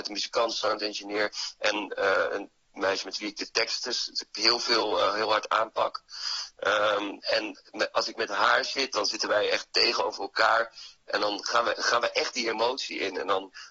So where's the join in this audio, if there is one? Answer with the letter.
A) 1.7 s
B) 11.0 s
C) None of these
C